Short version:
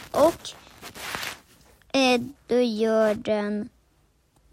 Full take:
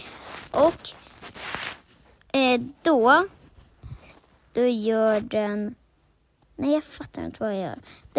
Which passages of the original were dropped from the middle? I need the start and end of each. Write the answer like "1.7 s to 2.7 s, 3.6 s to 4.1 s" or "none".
2.8 s to 4.4 s

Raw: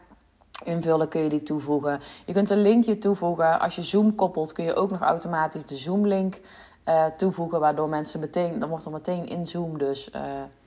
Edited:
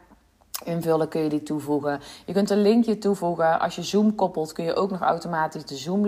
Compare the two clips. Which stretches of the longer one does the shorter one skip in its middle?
none

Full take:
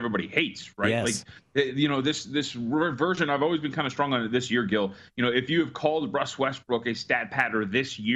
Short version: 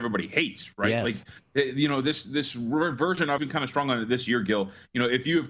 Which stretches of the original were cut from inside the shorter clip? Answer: 3.4 s to 3.6 s

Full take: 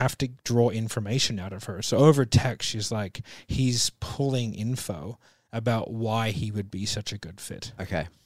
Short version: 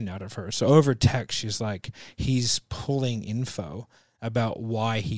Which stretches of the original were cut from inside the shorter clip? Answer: none

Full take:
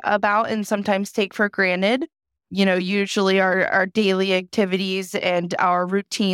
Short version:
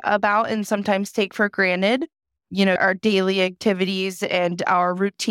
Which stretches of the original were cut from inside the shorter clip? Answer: 2.8 s to 3.7 s

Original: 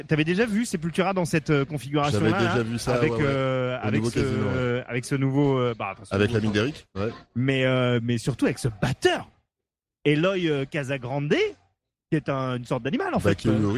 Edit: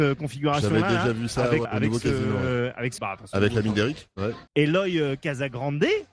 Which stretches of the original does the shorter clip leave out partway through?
3.2 s to 3.8 s, 5.1 s to 5.8 s, 7.3 s to 10.0 s

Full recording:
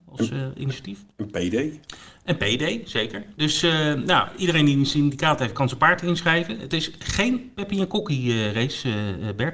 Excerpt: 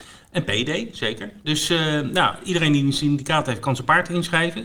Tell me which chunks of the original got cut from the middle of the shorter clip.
none

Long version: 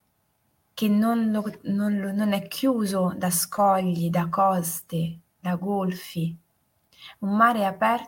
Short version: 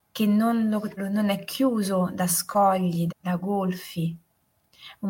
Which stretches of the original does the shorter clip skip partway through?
1.6 s to 2.0 s, 4.1 s to 5.3 s

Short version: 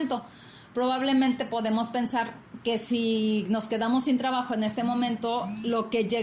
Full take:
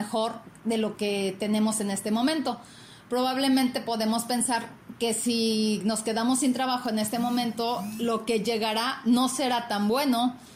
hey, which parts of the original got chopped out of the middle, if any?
none

